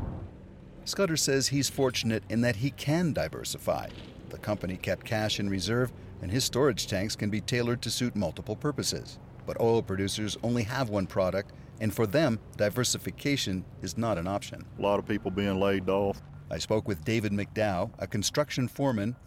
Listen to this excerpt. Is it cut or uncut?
cut